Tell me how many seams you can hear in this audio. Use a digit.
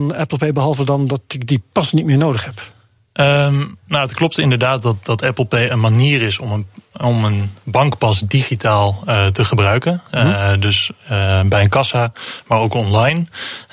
0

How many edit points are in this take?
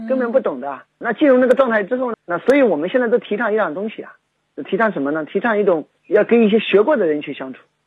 1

